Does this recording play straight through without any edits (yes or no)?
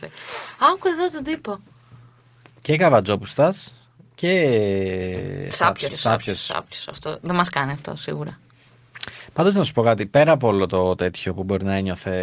no